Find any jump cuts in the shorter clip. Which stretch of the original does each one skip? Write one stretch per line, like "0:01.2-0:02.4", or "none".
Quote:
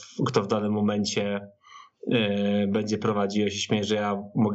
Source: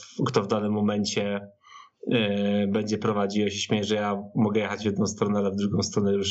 none